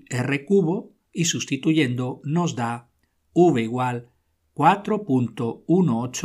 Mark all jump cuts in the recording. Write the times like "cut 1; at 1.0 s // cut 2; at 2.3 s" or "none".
cut 1; at 1.1 s